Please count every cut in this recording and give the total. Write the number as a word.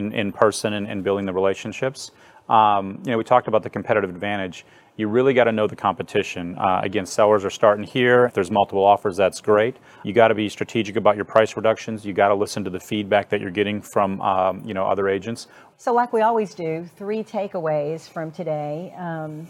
three